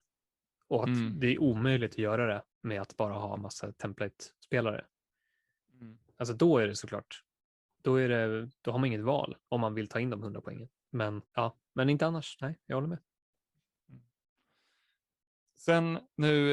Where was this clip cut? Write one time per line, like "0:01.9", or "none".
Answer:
0:02.5
0:11.3